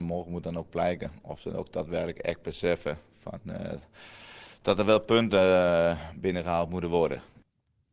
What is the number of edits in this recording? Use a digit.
0